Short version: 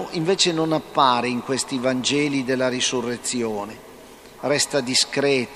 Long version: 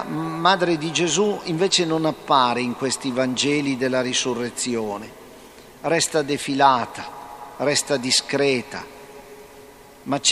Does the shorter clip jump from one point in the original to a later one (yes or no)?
yes